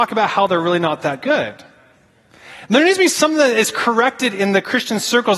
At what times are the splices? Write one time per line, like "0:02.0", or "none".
none

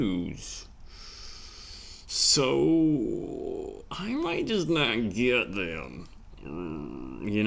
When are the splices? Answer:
none

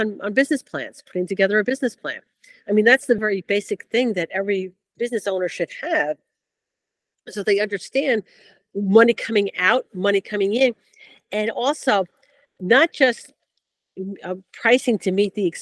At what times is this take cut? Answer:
0:03.2

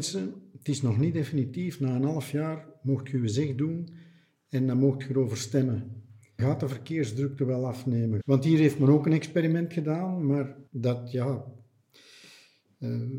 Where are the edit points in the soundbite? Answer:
0:06.4
0:08.2
0:10.7

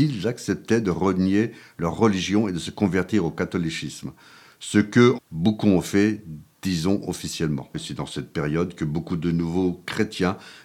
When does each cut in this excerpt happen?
0:05.2
0:07.7

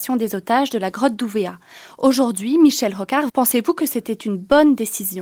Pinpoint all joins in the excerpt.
0:03.3

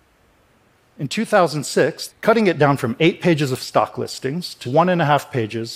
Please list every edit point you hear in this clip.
0:02.1
0:04.6

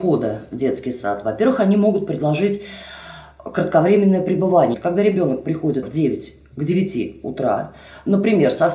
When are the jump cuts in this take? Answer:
0:04.7
0:05.8

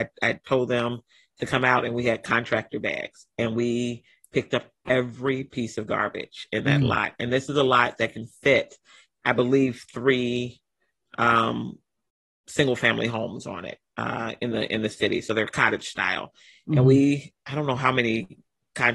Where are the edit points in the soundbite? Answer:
none

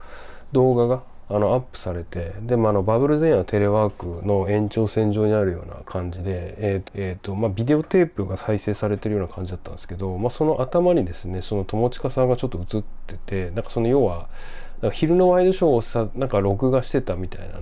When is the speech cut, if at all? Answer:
0:06.9

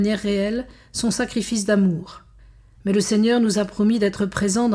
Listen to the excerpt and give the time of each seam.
0:02.7

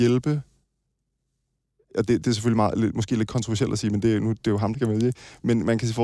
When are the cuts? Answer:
0:04.7

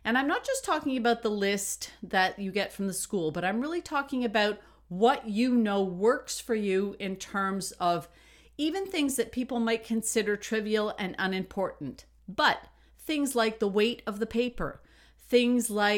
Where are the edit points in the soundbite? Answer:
none

